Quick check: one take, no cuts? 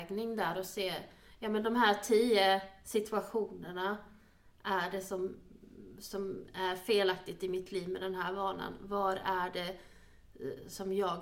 yes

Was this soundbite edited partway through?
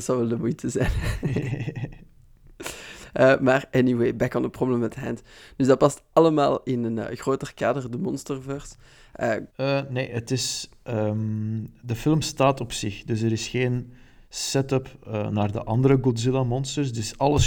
yes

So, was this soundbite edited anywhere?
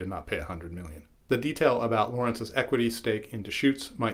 yes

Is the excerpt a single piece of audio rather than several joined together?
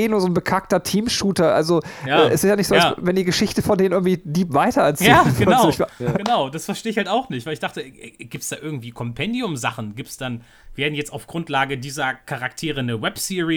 yes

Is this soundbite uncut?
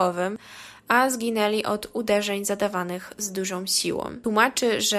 yes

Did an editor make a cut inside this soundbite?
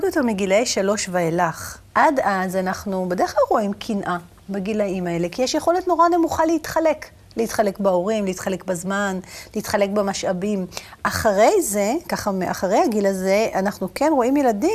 yes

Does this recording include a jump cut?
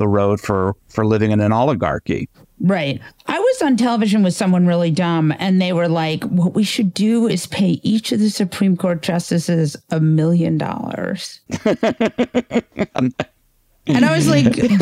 no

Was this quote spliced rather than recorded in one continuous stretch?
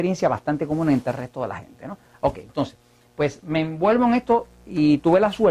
no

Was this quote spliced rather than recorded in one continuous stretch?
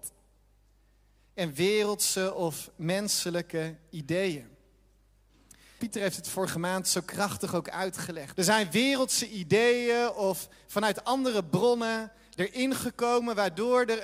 yes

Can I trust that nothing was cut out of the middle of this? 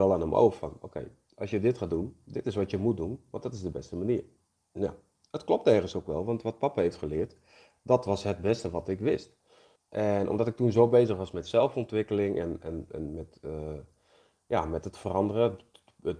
no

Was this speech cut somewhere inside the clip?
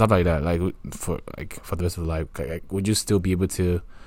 no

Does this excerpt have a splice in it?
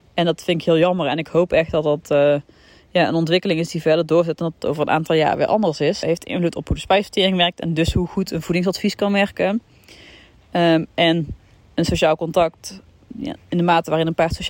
yes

